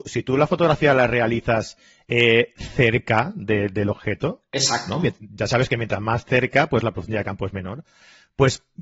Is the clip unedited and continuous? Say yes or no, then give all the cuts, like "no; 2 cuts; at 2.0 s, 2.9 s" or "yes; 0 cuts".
yes; 0 cuts